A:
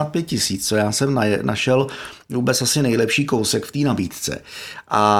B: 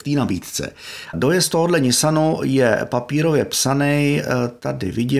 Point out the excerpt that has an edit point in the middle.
B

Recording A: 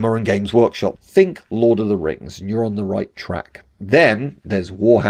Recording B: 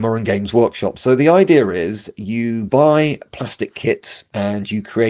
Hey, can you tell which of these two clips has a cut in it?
A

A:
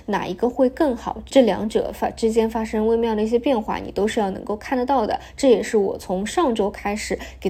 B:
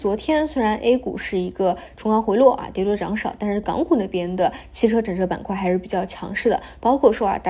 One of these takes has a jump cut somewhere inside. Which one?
A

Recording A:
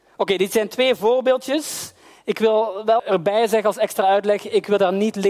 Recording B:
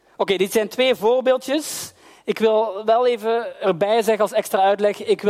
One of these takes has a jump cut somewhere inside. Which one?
A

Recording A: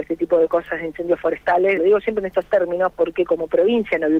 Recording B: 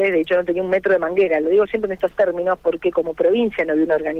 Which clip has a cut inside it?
A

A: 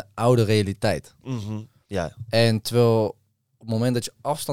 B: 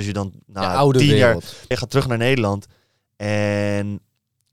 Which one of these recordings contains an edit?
B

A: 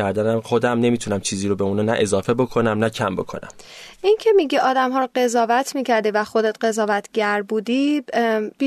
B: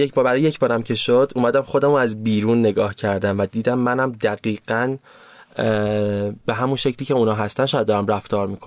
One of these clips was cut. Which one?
B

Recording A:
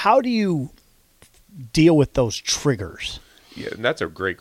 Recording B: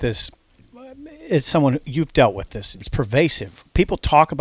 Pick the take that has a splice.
B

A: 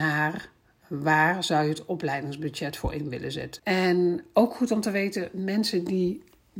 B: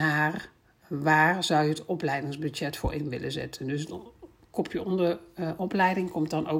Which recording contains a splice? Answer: A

